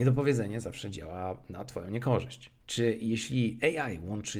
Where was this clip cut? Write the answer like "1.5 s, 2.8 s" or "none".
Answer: 2.6 s